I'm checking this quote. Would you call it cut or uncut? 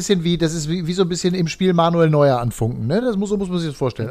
uncut